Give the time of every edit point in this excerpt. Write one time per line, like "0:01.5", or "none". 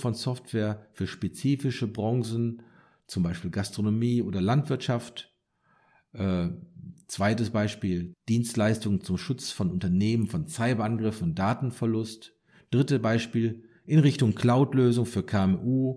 0:08.1